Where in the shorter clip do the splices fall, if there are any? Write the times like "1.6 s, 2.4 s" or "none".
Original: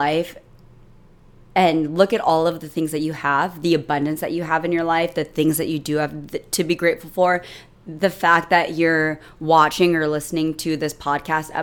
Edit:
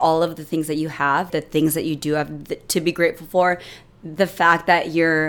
1.3 s